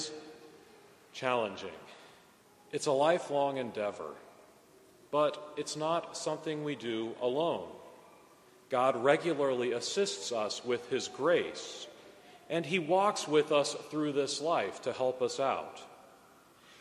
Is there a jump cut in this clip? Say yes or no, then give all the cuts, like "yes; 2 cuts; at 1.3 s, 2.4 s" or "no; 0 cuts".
no; 0 cuts